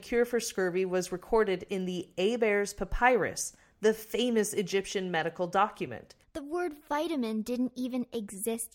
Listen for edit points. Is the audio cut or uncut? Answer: cut